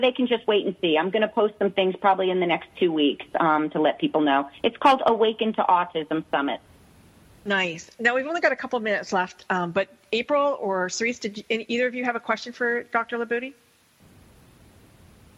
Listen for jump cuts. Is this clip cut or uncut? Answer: uncut